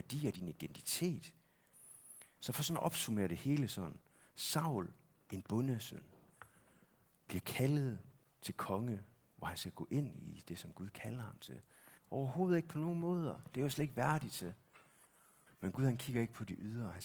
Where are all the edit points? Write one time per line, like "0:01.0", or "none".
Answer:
0:02.4
0:12.0
0:15.5